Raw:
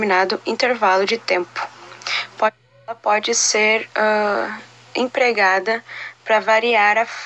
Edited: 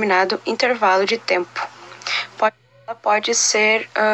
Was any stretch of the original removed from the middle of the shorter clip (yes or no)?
no